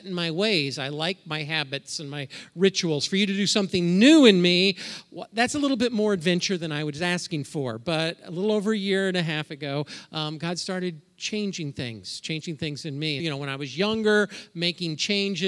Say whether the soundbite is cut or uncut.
cut